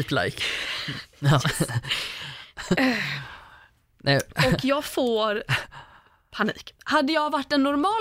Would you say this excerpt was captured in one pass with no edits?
yes; 0 cuts

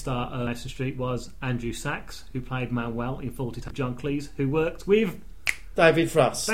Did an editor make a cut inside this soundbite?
no; 0 cuts

